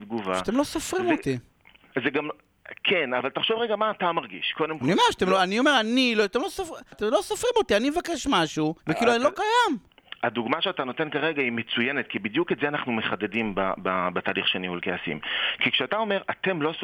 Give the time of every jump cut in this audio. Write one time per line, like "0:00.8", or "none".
0:06.9
0:08.8